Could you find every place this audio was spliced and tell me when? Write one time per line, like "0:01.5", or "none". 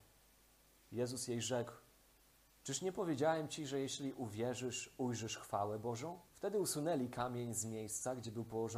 0:06.3